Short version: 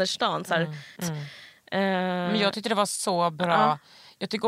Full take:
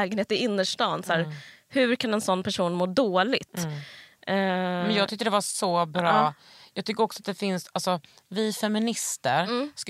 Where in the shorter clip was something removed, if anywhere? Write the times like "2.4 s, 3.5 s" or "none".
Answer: 1.0 s